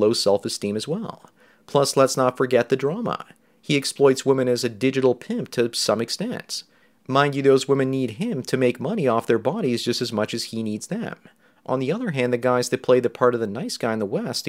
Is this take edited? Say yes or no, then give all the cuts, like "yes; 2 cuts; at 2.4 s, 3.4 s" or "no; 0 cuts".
no; 0 cuts